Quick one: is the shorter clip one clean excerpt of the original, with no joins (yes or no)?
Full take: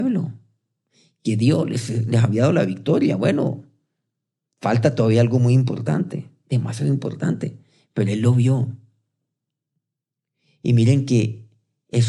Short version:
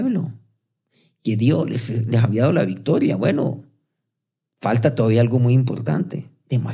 yes